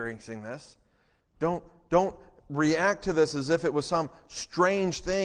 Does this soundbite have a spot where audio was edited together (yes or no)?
yes